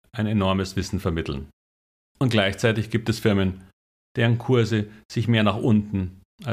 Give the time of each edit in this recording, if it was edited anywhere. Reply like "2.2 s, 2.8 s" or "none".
2.0 s